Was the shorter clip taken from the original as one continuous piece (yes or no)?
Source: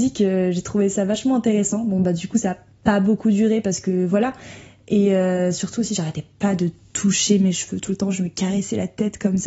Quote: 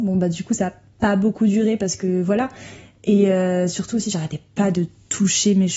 yes